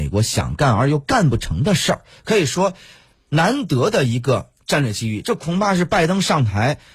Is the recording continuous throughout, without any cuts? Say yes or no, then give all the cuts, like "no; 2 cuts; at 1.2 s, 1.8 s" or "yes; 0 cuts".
yes; 0 cuts